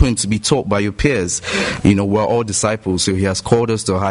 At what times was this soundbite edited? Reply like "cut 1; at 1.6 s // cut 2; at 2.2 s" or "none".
cut 1; at 1.8 s